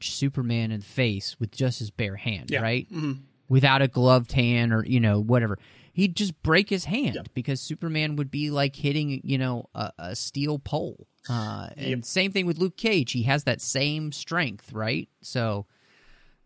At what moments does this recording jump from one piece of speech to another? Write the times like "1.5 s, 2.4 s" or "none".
none